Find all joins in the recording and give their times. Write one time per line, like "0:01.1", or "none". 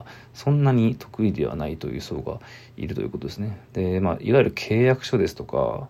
0:03.7